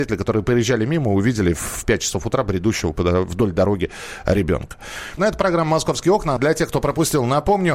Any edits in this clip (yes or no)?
yes